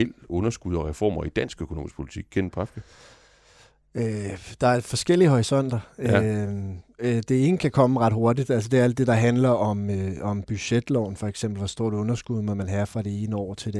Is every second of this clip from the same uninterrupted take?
yes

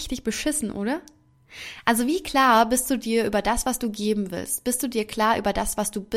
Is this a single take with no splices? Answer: yes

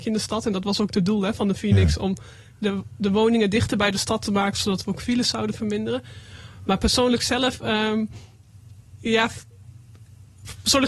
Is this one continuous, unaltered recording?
yes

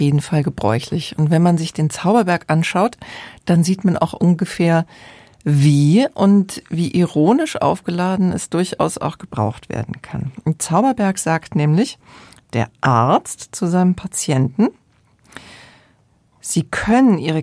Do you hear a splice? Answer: no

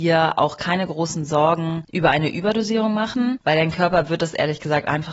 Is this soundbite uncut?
yes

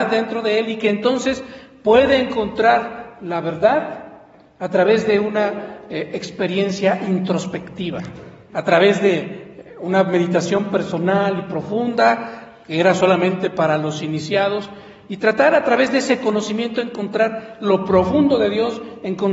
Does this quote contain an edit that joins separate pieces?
yes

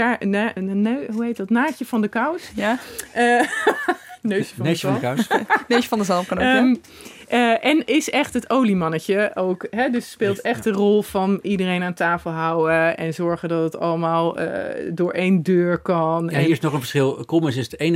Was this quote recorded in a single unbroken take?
yes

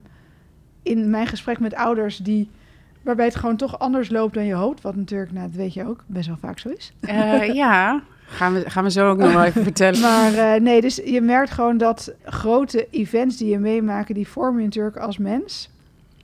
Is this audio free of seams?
no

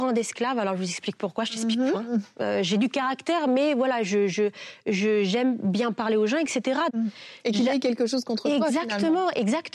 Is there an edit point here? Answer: yes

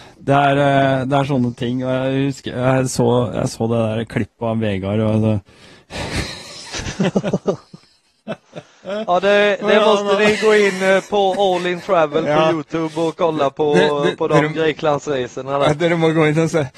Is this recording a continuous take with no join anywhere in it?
yes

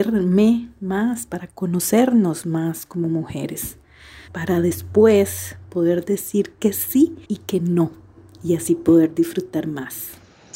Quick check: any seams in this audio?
yes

